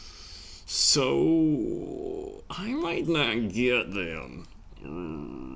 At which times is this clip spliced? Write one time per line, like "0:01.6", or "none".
0:03.0